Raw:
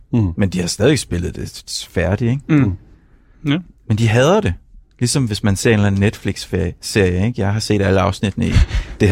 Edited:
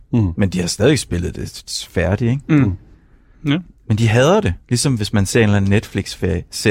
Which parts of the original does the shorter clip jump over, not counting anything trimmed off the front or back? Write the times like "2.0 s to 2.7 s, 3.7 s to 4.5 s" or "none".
4.6 s to 4.9 s